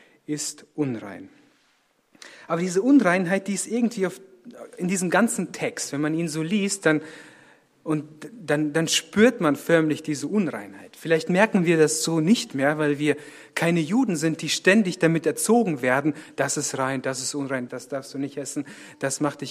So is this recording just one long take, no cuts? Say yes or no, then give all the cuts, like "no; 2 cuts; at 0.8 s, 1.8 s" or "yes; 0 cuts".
no; 1 cut; at 17.7 s